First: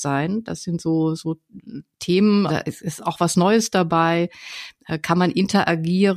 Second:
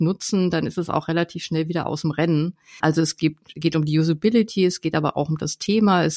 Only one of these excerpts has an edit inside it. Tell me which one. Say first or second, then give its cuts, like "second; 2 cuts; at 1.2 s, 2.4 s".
first; 1 cut; at 2.5 s